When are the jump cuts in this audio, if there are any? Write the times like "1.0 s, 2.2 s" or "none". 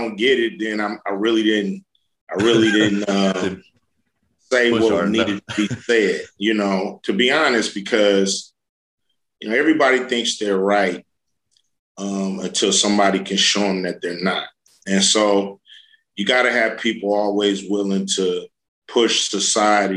none